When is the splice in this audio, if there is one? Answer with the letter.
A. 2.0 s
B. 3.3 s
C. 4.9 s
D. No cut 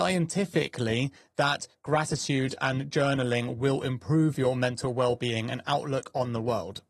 D